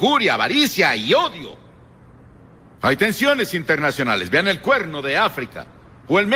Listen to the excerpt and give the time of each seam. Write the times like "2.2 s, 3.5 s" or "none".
2.8 s

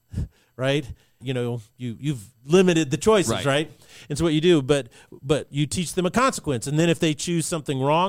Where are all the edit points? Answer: 1.2 s, 2.3 s

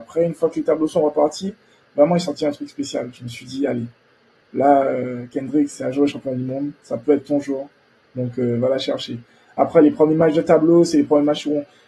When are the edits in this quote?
none

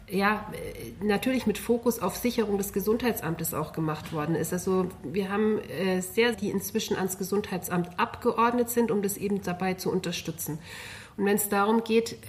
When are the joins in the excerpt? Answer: 6.3 s

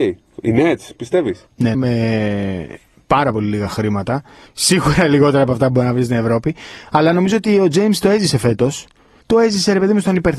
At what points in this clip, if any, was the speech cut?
1.7 s

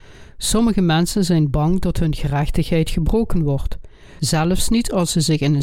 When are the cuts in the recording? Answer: 4.2 s

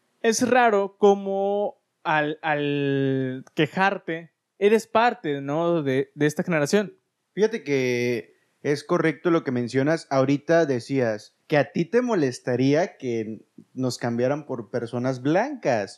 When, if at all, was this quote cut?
7.2 s, 11.4 s

